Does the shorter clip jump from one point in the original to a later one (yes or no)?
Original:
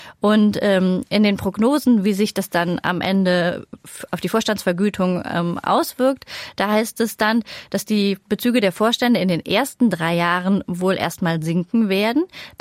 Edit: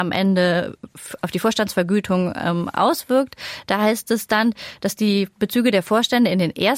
no